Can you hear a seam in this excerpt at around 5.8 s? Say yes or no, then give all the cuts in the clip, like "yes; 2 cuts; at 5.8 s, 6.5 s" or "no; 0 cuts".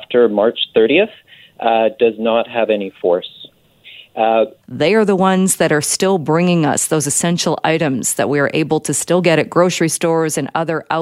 no; 1 cut; at 4.6 s